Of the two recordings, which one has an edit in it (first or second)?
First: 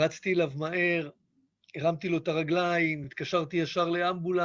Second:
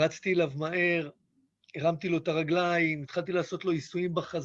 second